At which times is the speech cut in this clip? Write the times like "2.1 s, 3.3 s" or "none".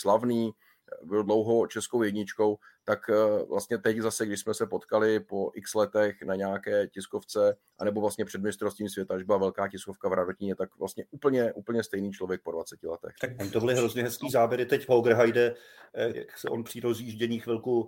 13.2 s, 16.1 s